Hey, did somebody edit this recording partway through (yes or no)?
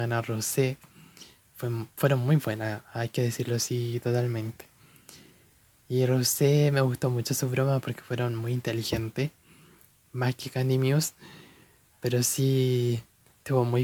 no